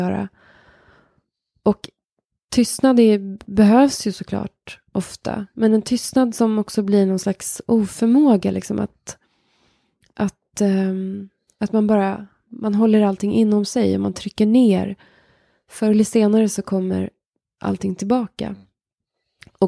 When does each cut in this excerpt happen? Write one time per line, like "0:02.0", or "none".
none